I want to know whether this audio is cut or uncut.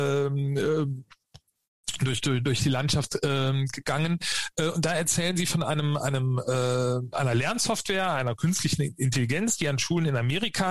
uncut